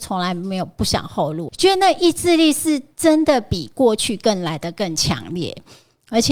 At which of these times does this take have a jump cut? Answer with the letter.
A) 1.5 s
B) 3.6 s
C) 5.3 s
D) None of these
A